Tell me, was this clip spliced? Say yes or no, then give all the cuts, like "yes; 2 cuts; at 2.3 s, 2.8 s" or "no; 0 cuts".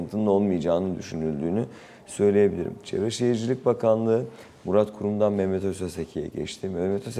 no; 0 cuts